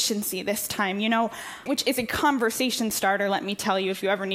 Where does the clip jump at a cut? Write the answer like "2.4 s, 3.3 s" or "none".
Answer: 1.7 s